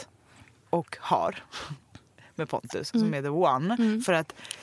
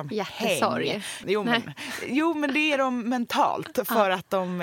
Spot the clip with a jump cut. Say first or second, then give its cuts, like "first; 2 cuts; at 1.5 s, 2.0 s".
second; 1 cut; at 1.2 s